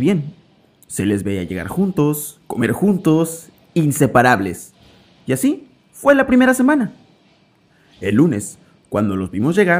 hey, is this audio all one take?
no; 1 cut; at 3.5 s

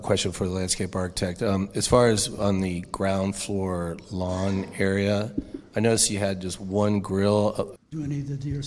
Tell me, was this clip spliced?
yes; 1 cut; at 7.8 s

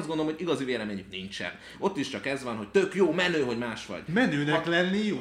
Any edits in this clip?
yes; 1 cut; at 4.1 s

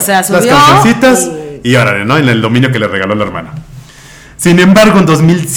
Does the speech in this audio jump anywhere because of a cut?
no; 0 cuts

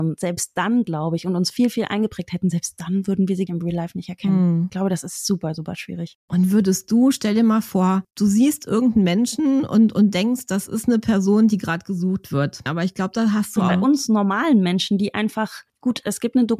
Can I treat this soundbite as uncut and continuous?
no; 3 cuts; at 3.5 s, 12.7 s, 13.7 s

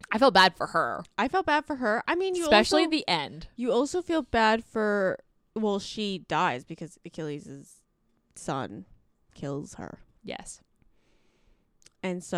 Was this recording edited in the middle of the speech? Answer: no; 0 cuts

